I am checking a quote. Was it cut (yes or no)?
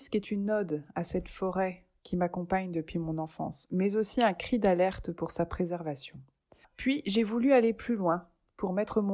no